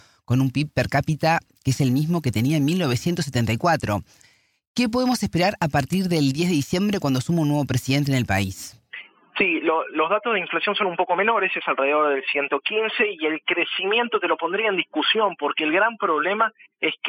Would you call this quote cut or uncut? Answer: uncut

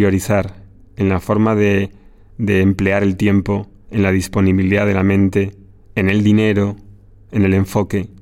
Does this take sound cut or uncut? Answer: uncut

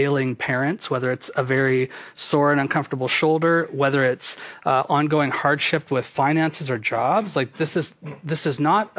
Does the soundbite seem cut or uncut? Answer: uncut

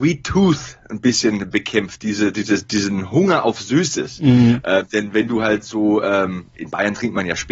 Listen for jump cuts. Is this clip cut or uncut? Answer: uncut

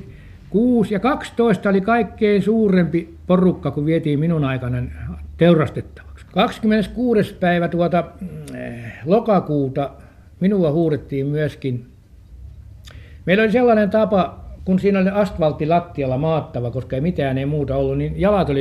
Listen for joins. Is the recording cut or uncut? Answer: cut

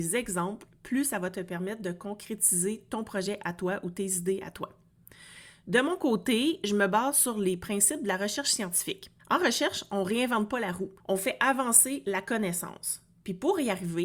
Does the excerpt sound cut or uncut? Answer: cut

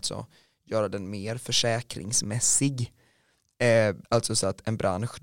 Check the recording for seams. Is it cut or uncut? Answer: cut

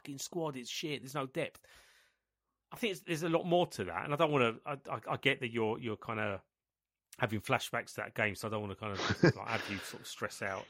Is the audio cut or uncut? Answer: uncut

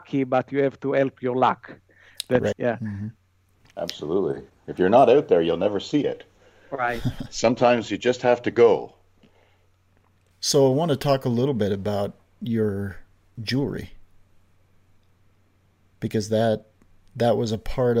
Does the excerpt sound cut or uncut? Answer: cut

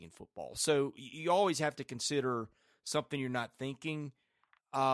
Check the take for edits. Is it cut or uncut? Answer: uncut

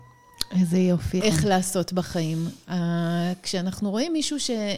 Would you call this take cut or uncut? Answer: cut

